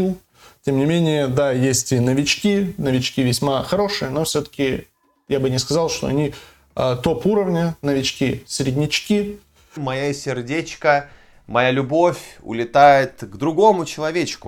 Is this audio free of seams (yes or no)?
no